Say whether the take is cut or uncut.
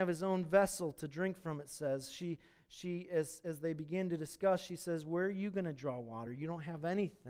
uncut